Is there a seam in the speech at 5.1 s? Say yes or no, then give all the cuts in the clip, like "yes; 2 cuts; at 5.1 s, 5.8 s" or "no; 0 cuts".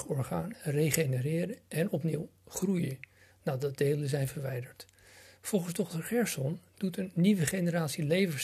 no; 0 cuts